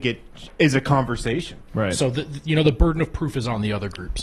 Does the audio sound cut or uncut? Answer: cut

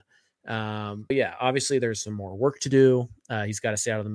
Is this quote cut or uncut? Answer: cut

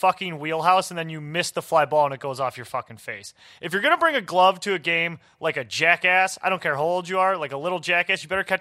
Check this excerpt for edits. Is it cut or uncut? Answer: uncut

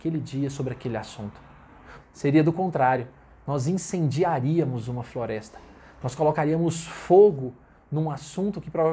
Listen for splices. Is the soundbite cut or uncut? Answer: cut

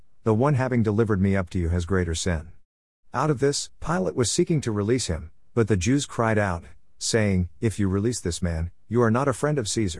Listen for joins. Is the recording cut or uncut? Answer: uncut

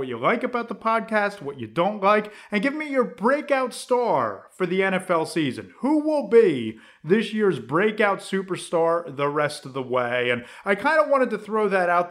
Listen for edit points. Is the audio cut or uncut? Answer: uncut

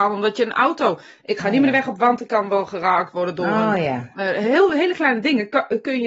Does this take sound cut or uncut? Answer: uncut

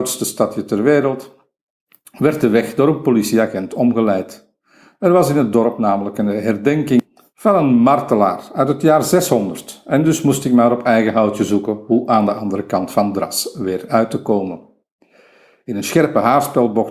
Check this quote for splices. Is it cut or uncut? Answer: uncut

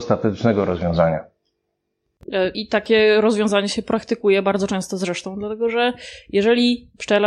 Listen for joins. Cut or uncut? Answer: cut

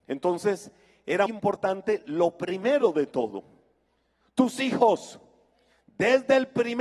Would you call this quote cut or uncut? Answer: cut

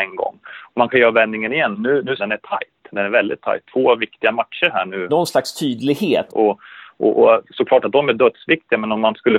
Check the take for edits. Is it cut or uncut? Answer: cut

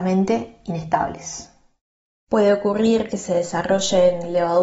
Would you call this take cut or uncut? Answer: uncut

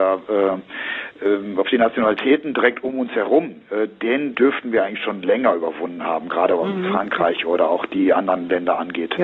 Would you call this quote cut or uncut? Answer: uncut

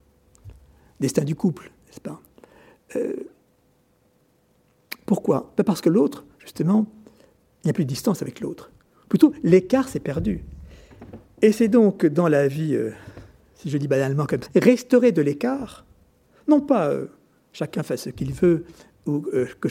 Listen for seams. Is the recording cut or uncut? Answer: cut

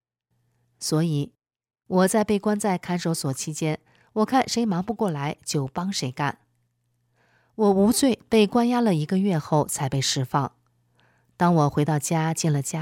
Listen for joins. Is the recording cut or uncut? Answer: uncut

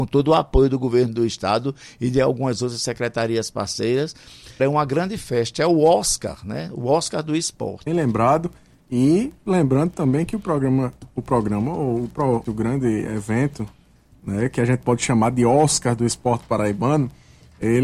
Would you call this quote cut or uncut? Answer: cut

